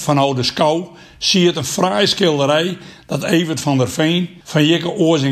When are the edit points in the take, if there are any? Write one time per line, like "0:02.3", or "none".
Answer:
0:04.4